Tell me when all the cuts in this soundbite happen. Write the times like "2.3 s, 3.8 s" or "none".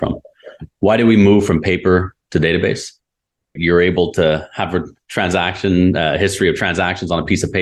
3.6 s